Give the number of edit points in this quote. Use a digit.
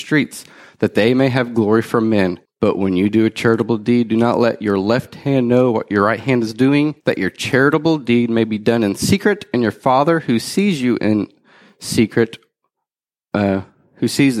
2